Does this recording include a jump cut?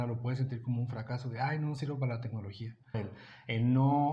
yes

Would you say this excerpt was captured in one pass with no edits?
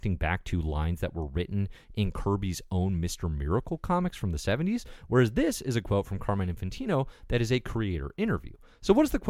yes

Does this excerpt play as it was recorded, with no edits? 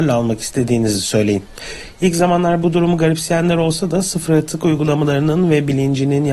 yes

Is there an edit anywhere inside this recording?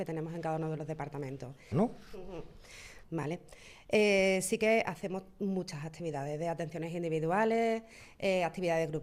yes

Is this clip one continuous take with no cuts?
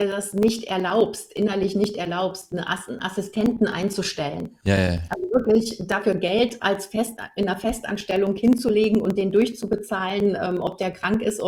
yes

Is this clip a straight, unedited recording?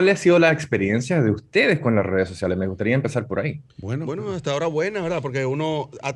no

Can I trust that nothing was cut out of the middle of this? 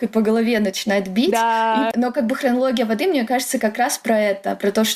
no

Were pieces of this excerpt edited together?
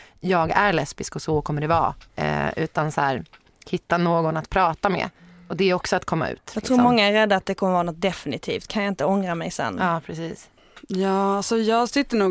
no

